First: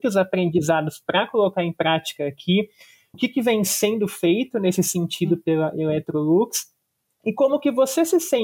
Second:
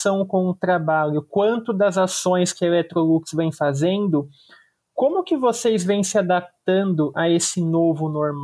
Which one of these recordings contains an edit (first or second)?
first